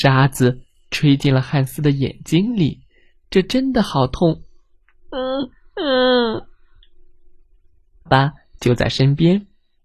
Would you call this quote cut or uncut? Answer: cut